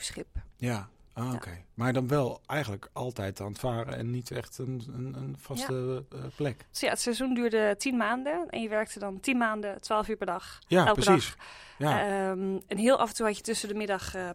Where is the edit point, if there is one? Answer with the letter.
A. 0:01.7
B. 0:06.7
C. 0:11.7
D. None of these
B